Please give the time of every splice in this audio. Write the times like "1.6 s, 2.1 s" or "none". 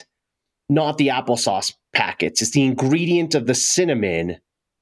none